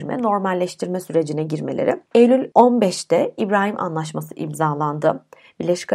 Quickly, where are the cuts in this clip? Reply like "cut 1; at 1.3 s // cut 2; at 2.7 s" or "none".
none